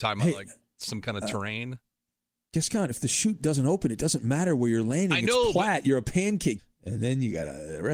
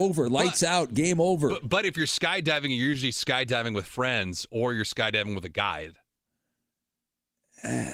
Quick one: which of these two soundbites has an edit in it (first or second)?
first